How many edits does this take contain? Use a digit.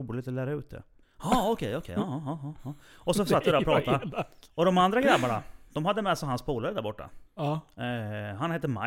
2